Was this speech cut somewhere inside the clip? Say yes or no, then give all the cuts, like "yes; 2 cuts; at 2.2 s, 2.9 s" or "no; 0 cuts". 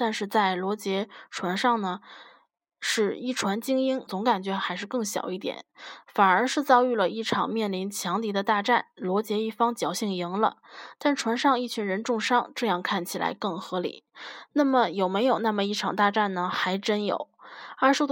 yes; 1 cut; at 4.1 s